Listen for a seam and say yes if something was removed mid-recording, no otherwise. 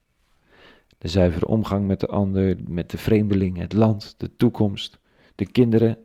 yes